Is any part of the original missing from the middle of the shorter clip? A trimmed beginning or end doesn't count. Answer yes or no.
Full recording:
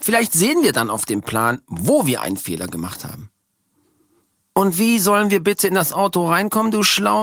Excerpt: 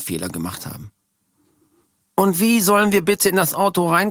no